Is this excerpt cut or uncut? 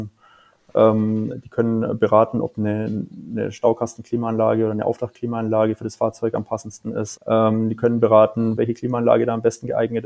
cut